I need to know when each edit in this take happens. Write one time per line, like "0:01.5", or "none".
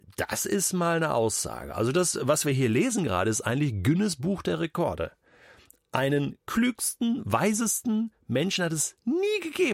none